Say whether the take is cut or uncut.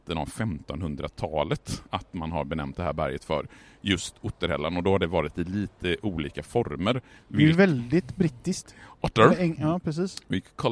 cut